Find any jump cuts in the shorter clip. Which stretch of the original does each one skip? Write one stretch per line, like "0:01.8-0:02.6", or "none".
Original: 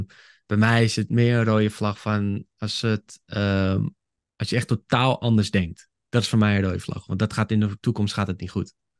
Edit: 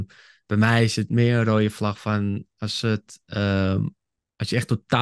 none